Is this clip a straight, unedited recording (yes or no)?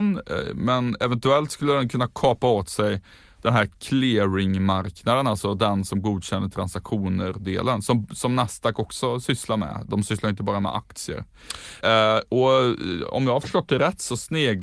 no